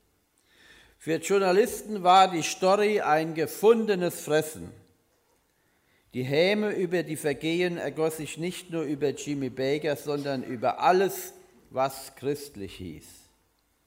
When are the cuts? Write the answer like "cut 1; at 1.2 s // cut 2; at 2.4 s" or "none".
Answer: none